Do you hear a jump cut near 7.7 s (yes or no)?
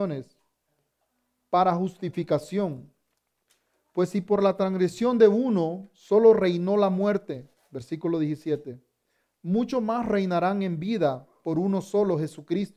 no